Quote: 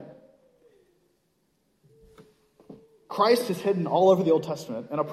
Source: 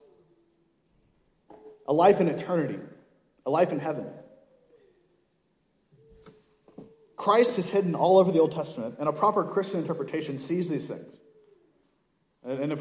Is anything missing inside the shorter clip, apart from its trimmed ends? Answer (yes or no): no